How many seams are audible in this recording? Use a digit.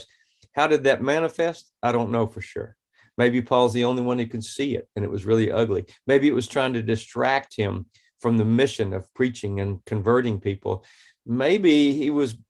0